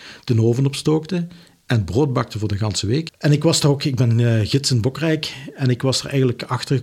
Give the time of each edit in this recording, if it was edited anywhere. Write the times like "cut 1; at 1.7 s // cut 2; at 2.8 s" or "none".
cut 1; at 3.1 s